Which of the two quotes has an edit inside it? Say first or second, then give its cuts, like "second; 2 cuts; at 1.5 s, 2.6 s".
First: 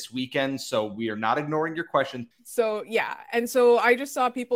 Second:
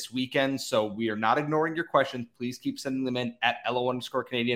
first; 1 cut; at 2.3 s